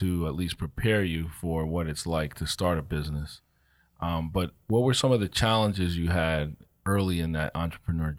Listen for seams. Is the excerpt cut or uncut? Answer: uncut